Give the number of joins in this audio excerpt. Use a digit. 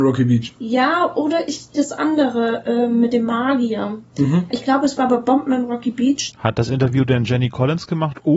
2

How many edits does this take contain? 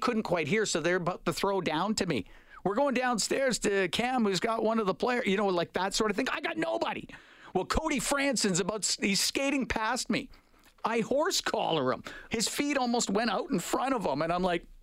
1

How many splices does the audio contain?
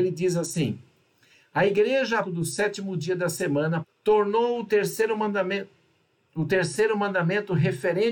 2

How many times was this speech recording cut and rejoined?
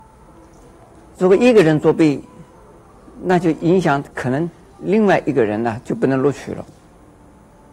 0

